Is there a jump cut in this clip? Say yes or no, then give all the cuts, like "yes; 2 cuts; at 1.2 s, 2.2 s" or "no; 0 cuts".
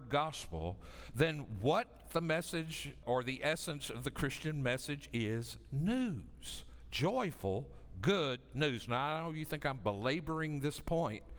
yes; 1 cut; at 3.0 s